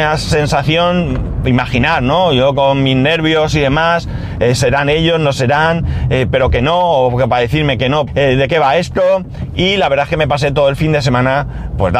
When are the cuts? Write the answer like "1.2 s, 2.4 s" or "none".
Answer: 6.3 s, 8.1 s